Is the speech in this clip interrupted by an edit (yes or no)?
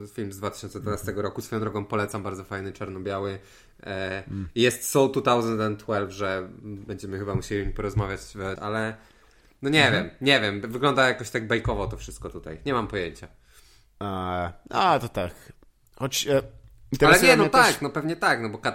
yes